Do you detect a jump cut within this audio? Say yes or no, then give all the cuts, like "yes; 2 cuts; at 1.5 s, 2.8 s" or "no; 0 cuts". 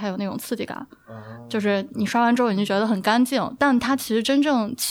no; 0 cuts